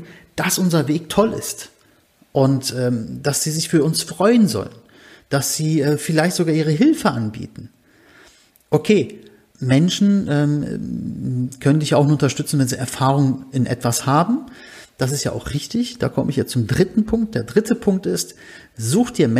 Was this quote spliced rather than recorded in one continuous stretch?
yes; 1 cut; at 9.5 s

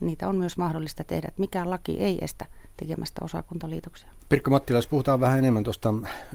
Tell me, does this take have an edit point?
yes; 1 cut; at 4.2 s

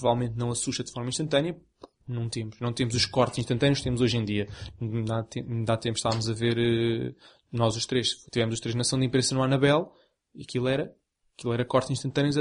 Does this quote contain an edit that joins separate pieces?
no; 0 cuts

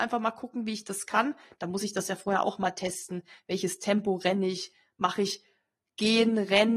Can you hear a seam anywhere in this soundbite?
yes; 1 cut; at 1.5 s

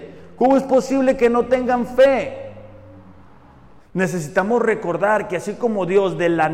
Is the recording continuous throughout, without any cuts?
no; 1 cut; at 3.8 s

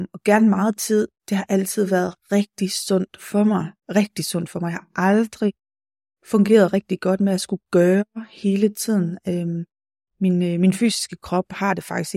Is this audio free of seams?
yes; 0 cuts

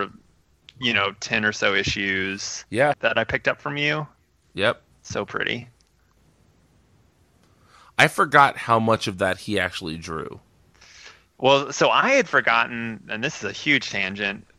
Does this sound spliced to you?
yes; 1 cut; at 2.9 s

